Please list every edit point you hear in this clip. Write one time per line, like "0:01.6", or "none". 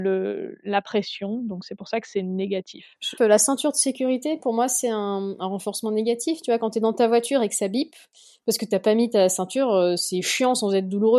0:03.2